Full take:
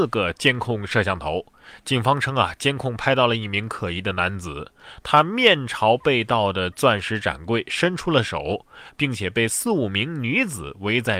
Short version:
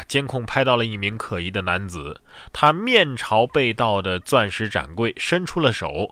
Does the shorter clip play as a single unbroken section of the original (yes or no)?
yes